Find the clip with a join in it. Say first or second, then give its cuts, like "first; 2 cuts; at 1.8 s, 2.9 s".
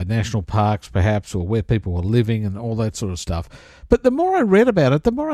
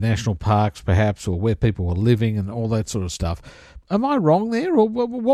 second; 1 cut; at 3.8 s